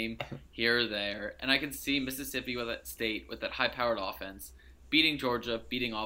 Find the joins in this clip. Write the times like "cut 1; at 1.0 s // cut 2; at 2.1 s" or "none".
none